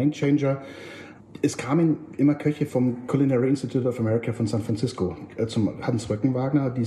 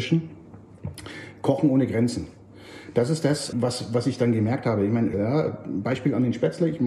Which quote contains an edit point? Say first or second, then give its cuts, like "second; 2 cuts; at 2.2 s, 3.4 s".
second; 2 cuts; at 3.5 s, 5.1 s